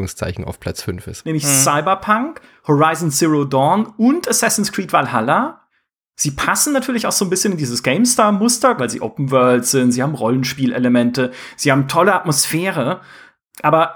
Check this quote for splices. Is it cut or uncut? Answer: cut